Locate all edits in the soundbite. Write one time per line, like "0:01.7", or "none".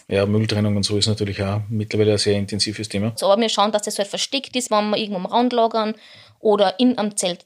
0:03.2
0:04.7